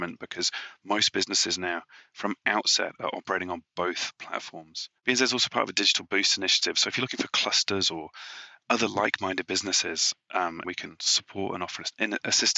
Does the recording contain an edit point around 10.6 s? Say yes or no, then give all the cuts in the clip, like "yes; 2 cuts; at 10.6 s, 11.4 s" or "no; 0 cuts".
yes; 2 cuts; at 5.0 s, 10.6 s